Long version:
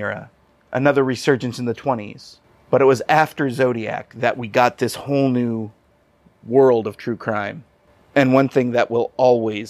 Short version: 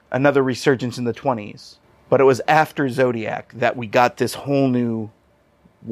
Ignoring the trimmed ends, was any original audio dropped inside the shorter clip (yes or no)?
no